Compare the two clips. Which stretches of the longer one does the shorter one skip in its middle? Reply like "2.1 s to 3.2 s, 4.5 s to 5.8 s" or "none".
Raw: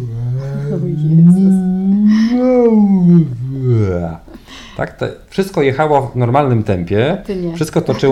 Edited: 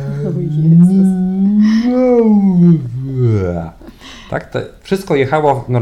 none